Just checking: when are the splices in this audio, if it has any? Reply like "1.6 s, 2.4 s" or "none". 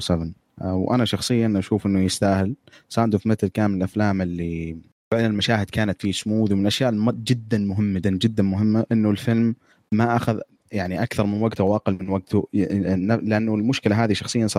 8.0 s